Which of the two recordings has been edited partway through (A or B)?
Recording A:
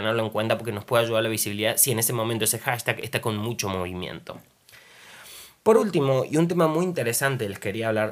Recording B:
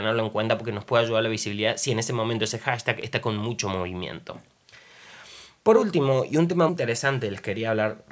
B